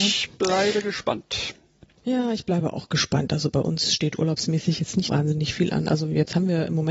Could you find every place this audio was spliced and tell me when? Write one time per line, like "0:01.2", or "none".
0:03.3
0:05.1